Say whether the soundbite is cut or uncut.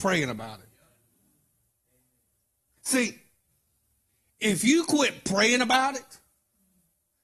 uncut